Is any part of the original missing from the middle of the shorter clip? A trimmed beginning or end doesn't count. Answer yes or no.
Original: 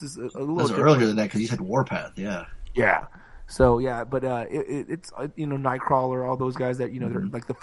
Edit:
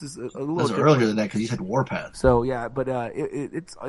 yes